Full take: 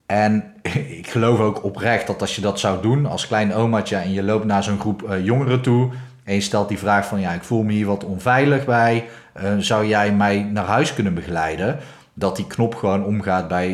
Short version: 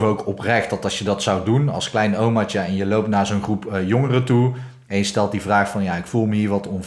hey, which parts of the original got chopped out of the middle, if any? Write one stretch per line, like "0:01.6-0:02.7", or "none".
none